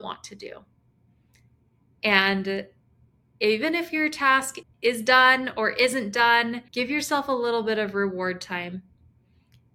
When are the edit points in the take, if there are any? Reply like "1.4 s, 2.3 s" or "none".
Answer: 4.6 s, 6.7 s